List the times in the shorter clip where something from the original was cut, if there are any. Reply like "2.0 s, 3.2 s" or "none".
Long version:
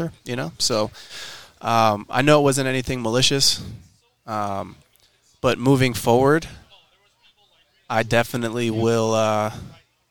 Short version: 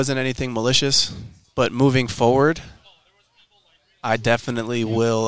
1.4 s